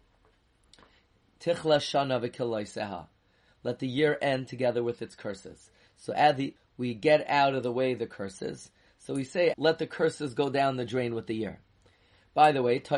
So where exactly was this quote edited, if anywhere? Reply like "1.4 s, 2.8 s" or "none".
6.6 s, 9.5 s

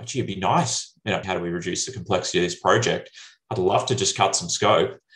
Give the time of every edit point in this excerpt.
1.2 s

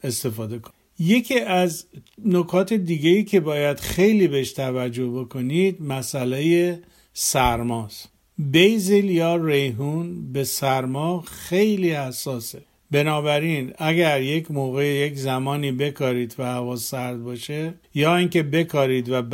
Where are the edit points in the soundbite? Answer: 17.8 s

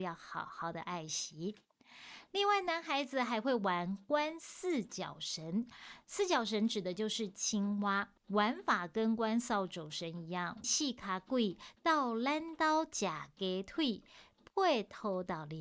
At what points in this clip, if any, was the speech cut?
8.2 s, 10.6 s

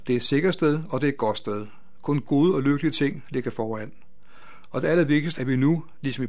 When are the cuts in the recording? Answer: 5.3 s

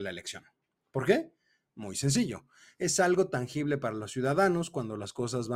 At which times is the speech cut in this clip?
none

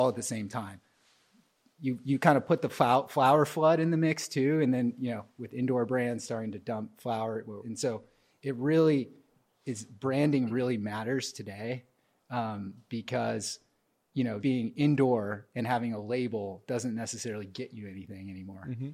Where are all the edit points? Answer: 7.6 s, 14.4 s

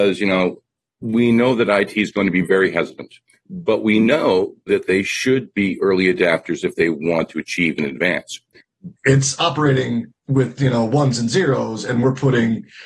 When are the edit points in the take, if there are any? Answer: 9.0 s, 10.2 s

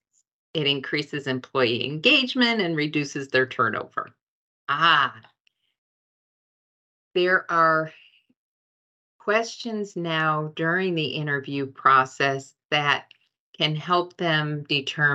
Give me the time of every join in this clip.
4.5 s

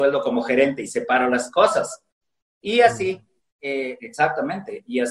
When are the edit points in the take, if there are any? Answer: none

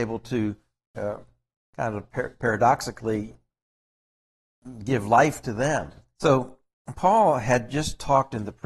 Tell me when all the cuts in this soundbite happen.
6.2 s

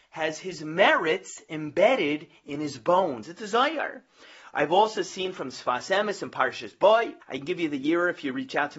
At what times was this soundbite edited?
7.2 s

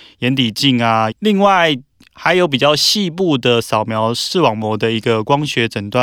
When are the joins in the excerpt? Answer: 1.1 s

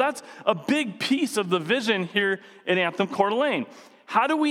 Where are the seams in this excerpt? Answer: none

